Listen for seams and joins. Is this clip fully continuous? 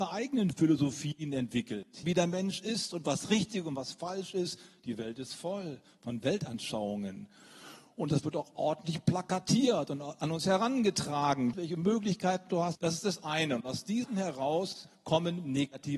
no; 3 cuts; at 2.0 s, 11.5 s, 12.8 s

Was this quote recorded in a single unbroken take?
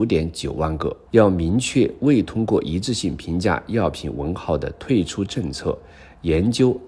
no; 1 cut; at 1.1 s

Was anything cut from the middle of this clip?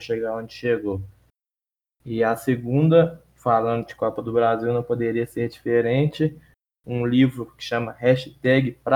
no; 0 cuts

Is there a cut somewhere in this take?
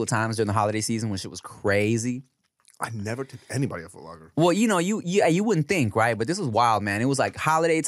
no; 0 cuts

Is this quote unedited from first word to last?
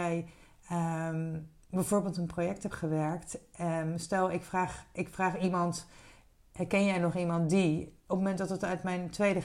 yes; 0 cuts

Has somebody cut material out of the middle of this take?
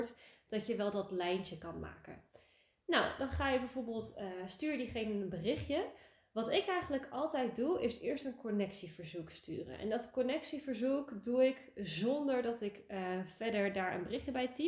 no; 0 cuts

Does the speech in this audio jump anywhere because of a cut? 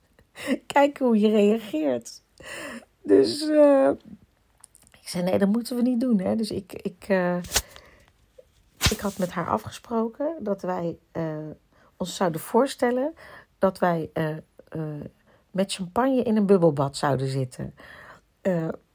no; 0 cuts

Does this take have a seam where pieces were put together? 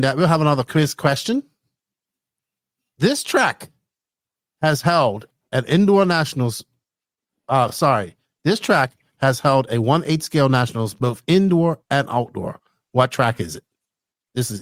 no; 0 cuts

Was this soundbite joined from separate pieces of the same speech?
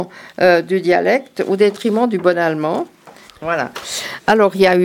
yes; 1 cut; at 3.3 s

